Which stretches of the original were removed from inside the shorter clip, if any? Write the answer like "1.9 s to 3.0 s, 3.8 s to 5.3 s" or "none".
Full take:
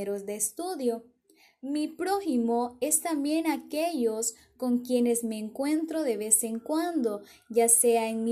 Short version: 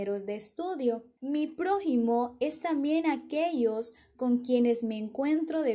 1.2 s to 1.6 s